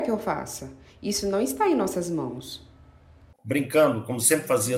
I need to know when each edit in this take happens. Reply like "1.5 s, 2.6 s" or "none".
none